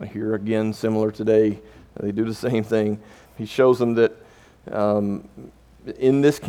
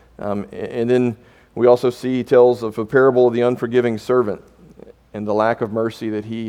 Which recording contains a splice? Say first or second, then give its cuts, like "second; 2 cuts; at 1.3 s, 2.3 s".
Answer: first; 1 cut; at 3.3 s